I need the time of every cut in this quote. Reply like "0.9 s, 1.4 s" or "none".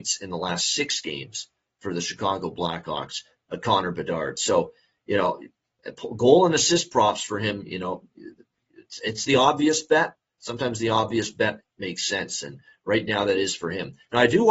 none